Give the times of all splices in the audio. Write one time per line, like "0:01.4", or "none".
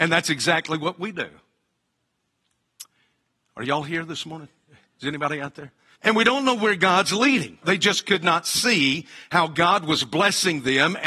0:05.9
0:07.6